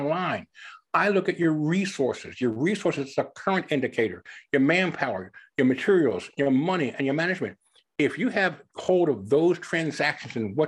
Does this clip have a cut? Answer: no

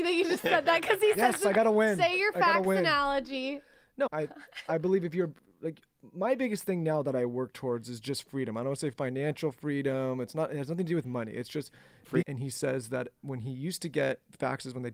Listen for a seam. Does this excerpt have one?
yes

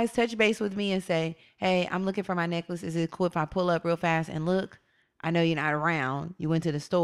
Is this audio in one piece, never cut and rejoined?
yes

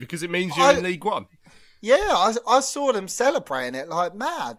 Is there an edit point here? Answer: no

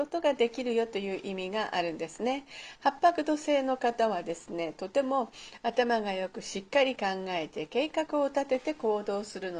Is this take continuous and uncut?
yes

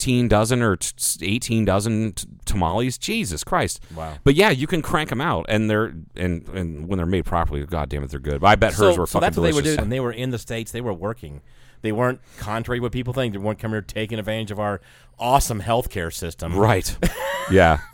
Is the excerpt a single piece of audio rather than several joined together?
no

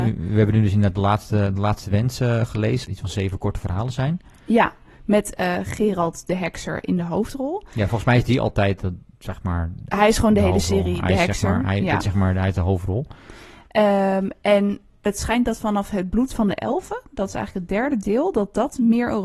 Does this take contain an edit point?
yes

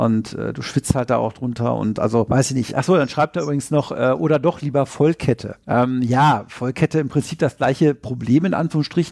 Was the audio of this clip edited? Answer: no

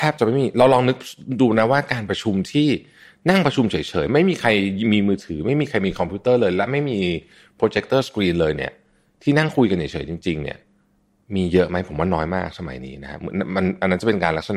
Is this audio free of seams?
yes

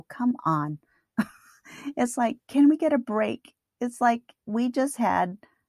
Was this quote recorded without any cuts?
yes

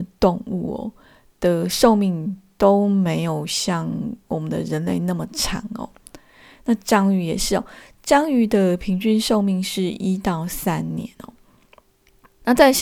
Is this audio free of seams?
yes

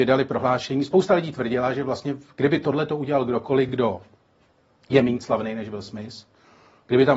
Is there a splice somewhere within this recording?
no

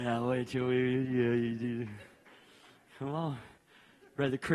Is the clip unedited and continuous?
yes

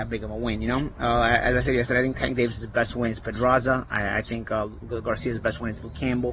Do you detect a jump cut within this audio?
yes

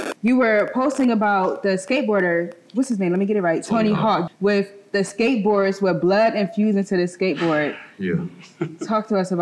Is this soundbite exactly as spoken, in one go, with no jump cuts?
no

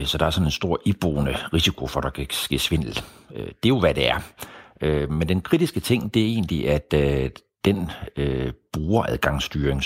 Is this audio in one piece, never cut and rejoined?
yes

